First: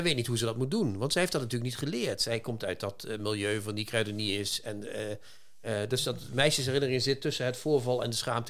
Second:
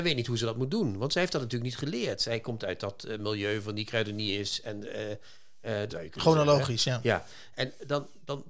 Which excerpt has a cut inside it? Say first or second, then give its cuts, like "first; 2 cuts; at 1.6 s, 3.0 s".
second; 1 cut; at 5.9 s